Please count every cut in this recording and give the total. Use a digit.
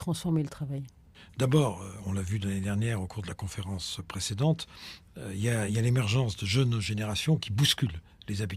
1